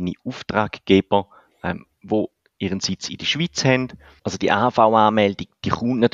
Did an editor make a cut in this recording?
yes; 1 cut; at 4.2 s

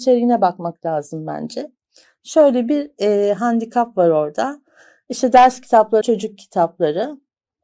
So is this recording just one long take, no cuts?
no; 1 cut; at 6.0 s

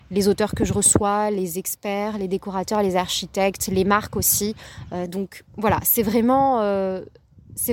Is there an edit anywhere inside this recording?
yes; 1 cut; at 5.1 s

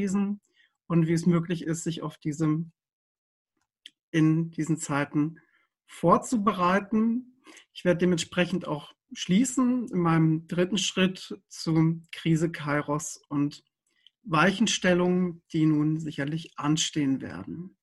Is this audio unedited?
yes; 0 cuts

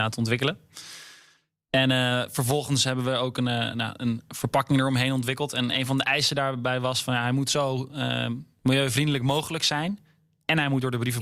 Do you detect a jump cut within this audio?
no; 0 cuts

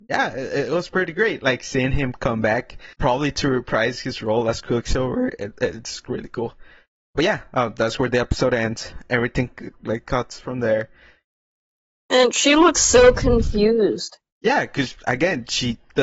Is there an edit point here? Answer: yes; 1 cut; at 2.9 s

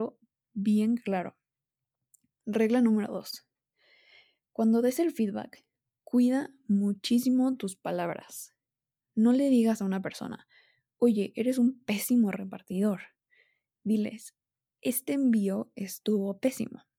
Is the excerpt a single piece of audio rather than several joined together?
yes; 0 cuts

